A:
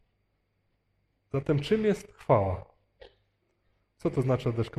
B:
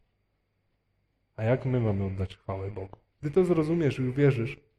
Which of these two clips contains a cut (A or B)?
B